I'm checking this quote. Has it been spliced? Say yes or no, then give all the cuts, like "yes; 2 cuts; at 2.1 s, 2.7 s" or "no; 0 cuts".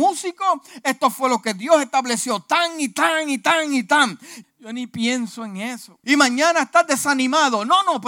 yes; 2 cuts; at 4.4 s, 6.0 s